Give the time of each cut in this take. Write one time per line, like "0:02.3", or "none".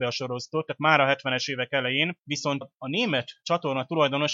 0:02.6